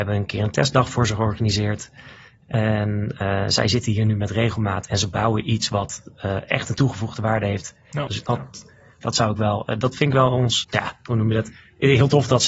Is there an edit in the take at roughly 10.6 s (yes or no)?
yes